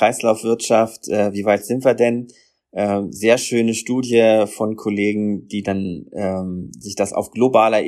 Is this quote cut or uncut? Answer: uncut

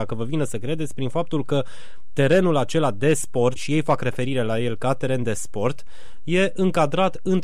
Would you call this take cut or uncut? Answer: cut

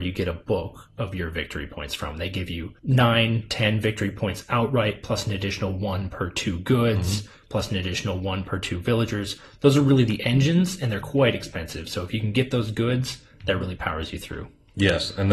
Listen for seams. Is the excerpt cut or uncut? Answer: cut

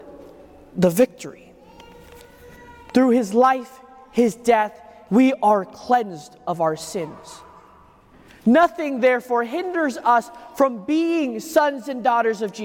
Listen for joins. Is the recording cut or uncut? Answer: cut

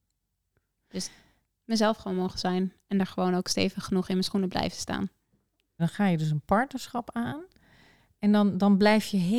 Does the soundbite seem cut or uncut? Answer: cut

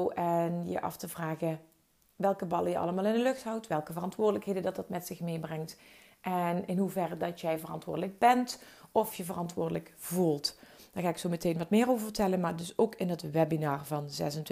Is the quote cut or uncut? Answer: uncut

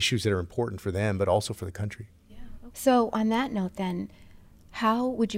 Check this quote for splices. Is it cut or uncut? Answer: cut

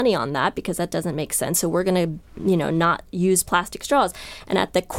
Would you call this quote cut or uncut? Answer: uncut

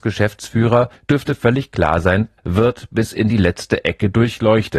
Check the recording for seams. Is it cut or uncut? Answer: cut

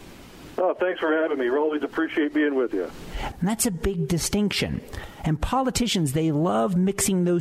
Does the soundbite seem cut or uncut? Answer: cut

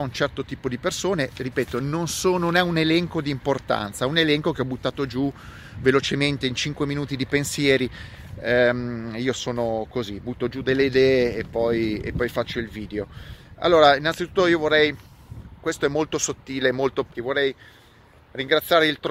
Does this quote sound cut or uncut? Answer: cut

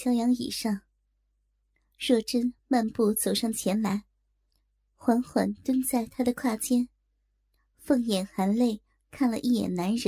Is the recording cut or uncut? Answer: uncut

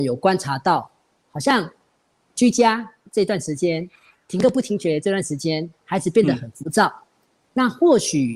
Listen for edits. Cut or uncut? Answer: uncut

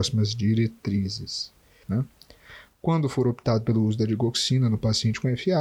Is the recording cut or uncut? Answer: cut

